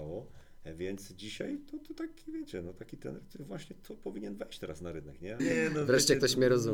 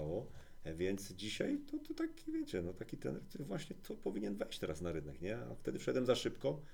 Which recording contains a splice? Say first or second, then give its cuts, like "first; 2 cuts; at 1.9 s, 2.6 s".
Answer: first; 1 cut; at 5.4 s